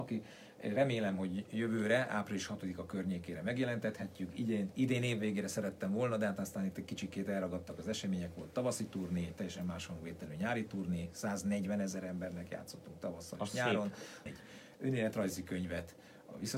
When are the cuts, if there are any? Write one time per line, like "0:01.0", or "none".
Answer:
0:14.3